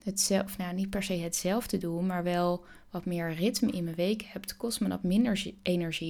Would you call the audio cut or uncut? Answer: uncut